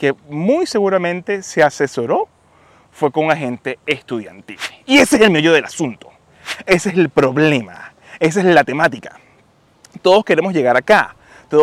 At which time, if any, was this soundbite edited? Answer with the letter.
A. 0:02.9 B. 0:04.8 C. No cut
C